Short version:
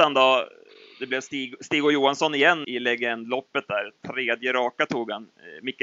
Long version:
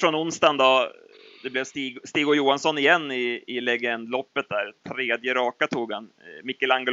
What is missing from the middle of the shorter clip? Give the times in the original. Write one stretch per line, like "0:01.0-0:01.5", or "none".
0:03.1-0:03.5

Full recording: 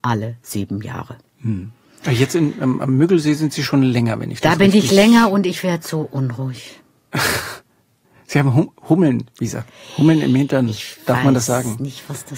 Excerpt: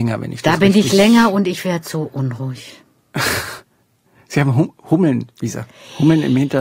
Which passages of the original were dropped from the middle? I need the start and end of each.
none

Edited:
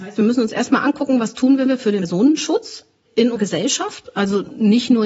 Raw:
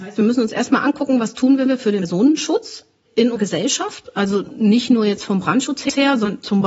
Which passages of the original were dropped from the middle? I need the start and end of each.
none

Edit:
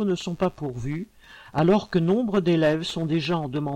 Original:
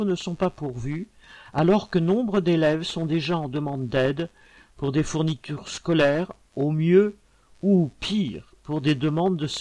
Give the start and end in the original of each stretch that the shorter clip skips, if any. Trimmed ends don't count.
none

